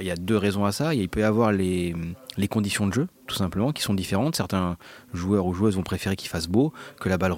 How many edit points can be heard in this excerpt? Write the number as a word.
one